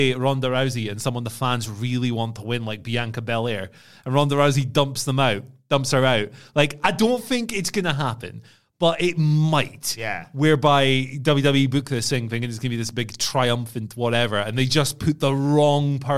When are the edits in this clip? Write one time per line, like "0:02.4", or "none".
none